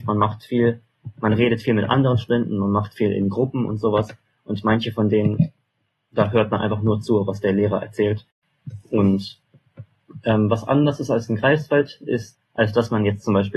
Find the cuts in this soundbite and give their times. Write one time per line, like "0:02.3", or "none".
0:12.3